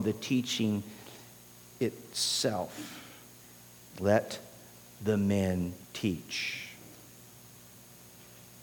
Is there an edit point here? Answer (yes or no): yes